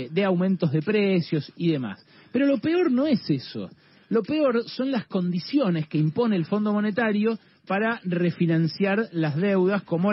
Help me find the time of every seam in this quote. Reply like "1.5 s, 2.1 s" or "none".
none